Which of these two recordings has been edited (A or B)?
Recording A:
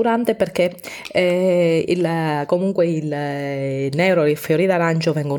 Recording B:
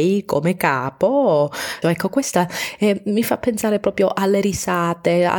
B